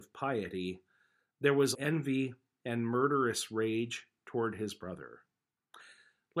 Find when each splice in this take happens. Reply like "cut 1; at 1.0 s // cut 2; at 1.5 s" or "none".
cut 1; at 1.7 s